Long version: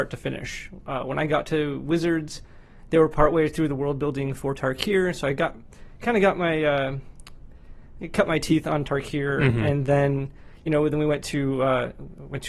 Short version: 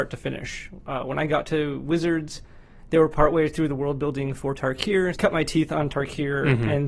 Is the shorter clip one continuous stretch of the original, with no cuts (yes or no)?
no